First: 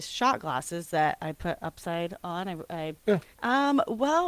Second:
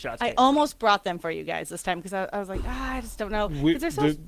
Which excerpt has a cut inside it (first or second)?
first